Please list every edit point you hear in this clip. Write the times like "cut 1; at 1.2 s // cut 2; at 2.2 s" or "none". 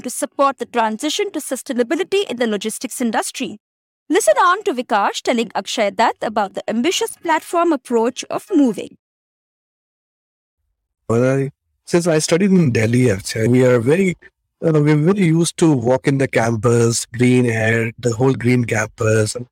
none